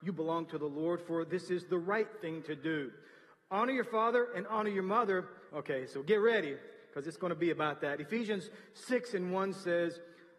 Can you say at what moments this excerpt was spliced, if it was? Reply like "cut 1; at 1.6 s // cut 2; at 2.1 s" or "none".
cut 1; at 5.5 s